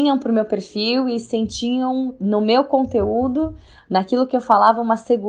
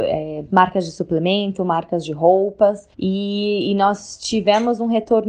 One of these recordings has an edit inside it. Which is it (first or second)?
second